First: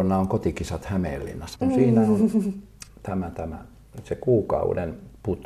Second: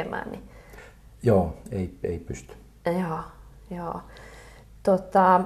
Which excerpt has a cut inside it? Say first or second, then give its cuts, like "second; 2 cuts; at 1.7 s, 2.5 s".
first; 2 cuts; at 1.5 s, 2.9 s